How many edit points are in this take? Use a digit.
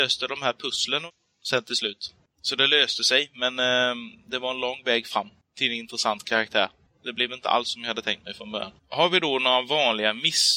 1